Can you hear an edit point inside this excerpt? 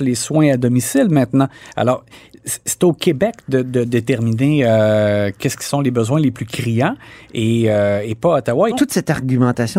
yes; 1 cut; at 8.7 s

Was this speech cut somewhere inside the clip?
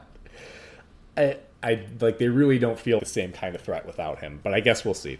yes; 2 cuts; at 1.5 s, 3.0 s

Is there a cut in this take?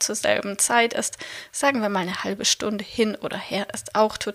no; 0 cuts

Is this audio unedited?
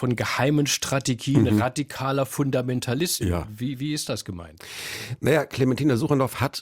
yes; 0 cuts

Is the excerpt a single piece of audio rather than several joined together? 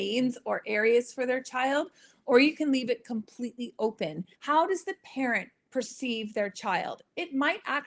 no; 1 cut; at 4.3 s

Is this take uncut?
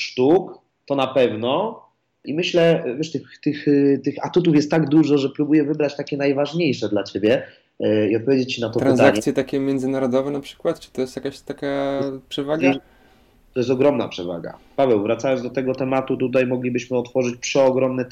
yes; 0 cuts

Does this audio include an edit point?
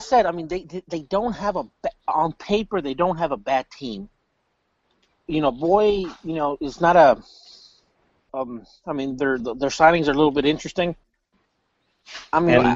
yes; 2 cuts; at 8.3 s, 9.4 s

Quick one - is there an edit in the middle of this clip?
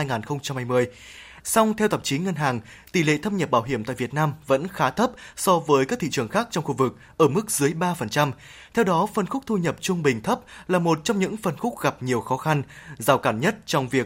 yes; 1 cut; at 1.4 s

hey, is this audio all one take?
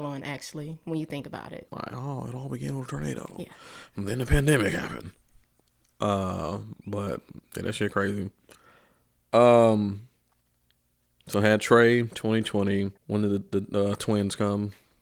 no; 2 cuts; at 1.7 s, 13.0 s

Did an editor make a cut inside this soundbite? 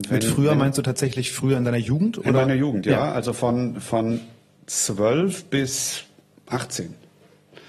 no; 0 cuts

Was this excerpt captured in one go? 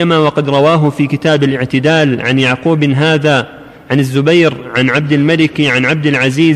yes; 0 cuts

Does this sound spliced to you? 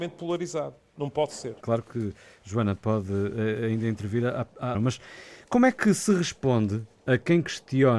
yes; 2 cuts; at 1.6 s, 4.7 s

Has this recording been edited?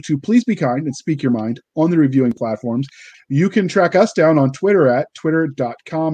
yes; 1 cut; at 3.1 s

